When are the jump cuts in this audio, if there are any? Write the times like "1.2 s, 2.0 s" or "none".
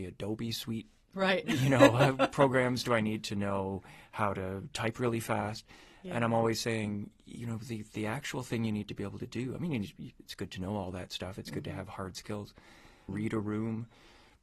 13.1 s